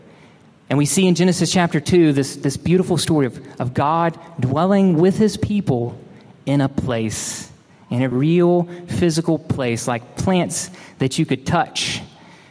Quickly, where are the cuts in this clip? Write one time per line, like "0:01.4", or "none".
0:08.1